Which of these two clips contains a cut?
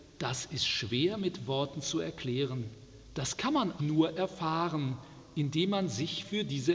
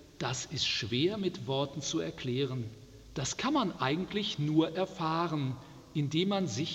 first; 1 cut; at 3.8 s

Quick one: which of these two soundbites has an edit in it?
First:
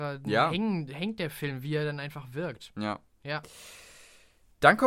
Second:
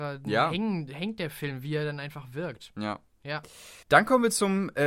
second; 1 cut; at 3.8 s

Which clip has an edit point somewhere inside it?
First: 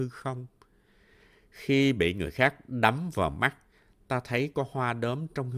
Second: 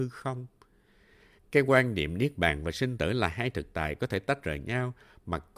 second; 1 cut; at 1.4 s

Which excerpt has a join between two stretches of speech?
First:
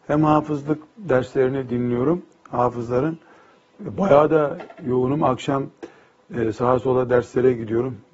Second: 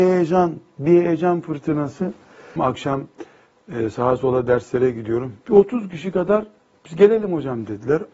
second; 2 cuts; at 2.6 s, 5.4 s

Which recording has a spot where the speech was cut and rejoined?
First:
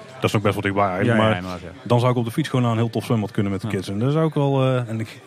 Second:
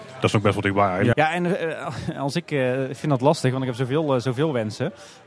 second; 1 cut; at 1.1 s

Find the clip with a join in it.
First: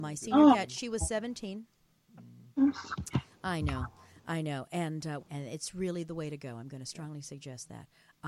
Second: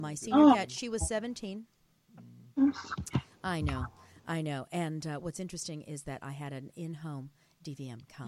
first; 1 cut; at 5.2 s

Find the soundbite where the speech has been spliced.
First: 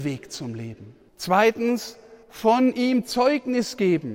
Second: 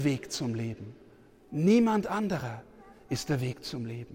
first; 2 cuts; at 1.1 s, 2.2 s

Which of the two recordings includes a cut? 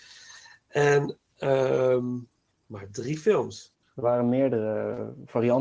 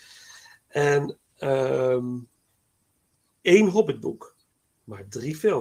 first; 2 cuts; at 2.5 s, 3.8 s

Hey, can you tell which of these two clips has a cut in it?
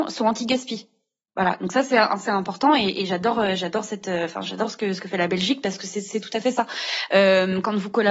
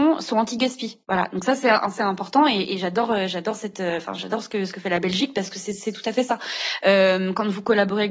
second; 1 cut; at 1.0 s

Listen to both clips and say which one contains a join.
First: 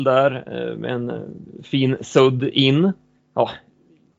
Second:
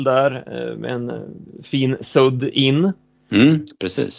first; 1 cut; at 3.2 s

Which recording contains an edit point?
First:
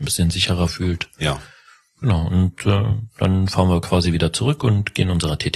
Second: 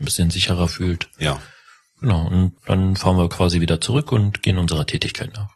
second; 1 cut; at 2.6 s

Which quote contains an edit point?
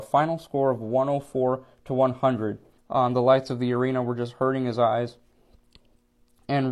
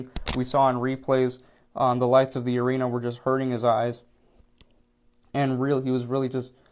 first; 1 cut; at 2.8 s

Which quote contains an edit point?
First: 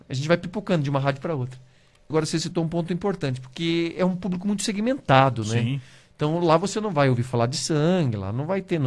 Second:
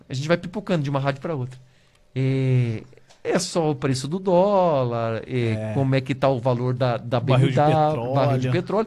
first; 1 cut; at 2.1 s

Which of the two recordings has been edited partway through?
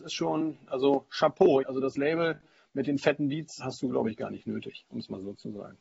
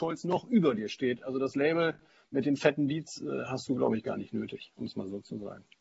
first; 2 cuts; at 1.6 s, 3.6 s

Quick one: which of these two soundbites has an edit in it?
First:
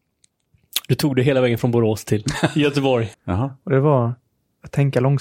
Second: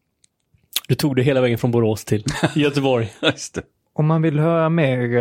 first; 1 cut; at 3.1 s

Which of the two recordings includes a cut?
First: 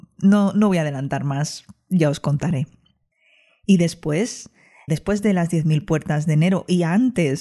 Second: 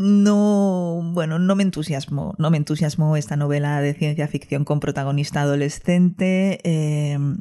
first; 1 cut; at 4.9 s

